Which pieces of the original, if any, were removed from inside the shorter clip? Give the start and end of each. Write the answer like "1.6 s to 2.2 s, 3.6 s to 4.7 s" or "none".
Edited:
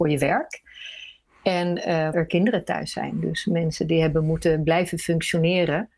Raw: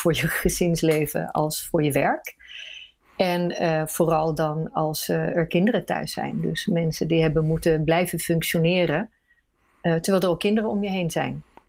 3.9 s to 5.3 s